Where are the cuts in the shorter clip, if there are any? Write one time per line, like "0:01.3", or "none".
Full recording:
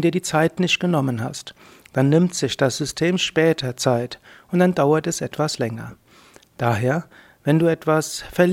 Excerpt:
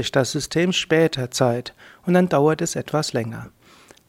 none